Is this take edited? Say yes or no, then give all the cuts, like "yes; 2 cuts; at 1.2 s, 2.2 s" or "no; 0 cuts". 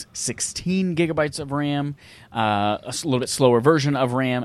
no; 0 cuts